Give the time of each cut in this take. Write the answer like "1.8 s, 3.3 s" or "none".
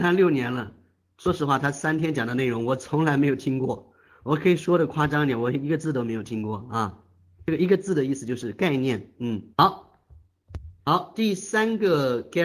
9.5 s, 10.8 s